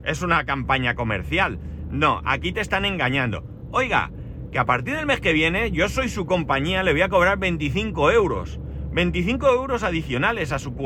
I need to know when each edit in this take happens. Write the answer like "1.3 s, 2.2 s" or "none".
none